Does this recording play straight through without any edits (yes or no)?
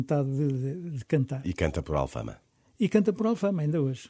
yes